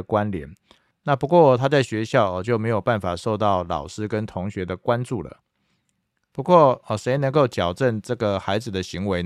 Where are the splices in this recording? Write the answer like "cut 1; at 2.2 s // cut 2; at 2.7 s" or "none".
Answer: cut 1; at 0.9 s